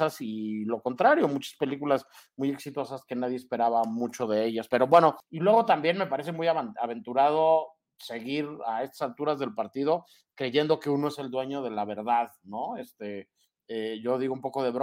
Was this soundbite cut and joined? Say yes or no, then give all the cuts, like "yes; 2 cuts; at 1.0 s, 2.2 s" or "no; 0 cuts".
no; 0 cuts